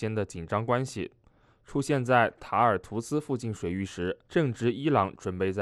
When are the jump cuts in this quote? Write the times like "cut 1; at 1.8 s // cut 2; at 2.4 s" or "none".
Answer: cut 1; at 1.5 s // cut 2; at 4.2 s